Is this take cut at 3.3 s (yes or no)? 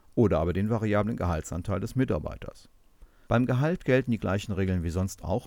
yes